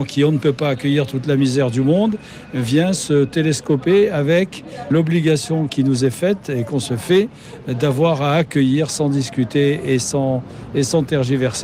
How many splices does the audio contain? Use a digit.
1